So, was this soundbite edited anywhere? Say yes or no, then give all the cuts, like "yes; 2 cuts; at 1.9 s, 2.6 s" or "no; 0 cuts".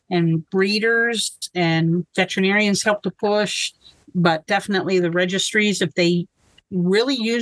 yes; 1 cut; at 4.0 s